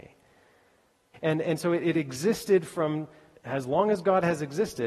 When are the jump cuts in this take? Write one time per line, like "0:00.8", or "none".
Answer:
0:01.1
0:03.4